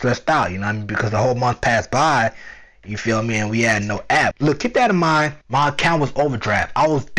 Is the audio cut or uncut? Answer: cut